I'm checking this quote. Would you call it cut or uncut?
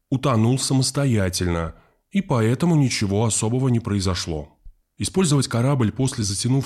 cut